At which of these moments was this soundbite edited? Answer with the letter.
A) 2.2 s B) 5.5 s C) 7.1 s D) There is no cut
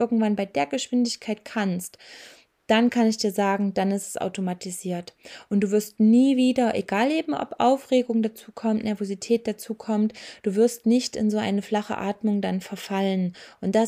D